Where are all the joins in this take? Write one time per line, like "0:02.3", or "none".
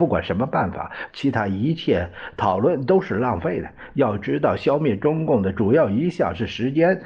0:01.1